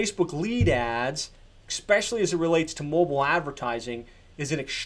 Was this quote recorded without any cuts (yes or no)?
yes